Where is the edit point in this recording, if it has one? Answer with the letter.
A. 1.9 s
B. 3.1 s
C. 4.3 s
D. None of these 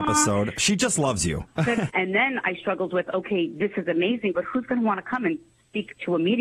A